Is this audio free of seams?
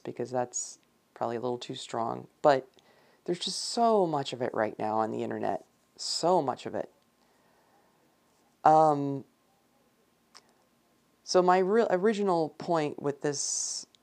no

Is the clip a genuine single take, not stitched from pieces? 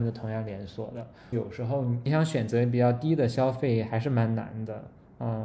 no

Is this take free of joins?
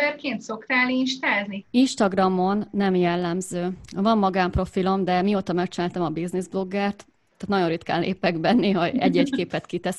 no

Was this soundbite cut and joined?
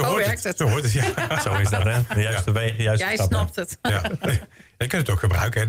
no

